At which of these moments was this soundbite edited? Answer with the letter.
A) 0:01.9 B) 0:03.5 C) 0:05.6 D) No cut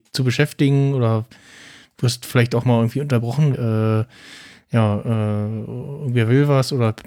B